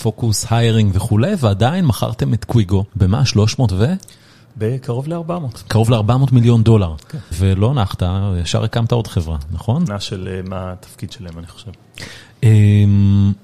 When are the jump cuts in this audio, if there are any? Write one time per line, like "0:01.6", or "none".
0:02.9
0:07.3
0:09.9